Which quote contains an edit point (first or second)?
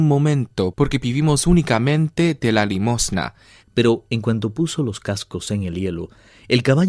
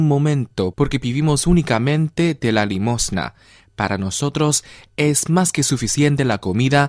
first